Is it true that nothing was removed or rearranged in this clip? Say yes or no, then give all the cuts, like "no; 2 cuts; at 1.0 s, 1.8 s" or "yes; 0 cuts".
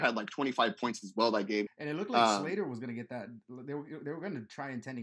no; 1 cut; at 1.7 s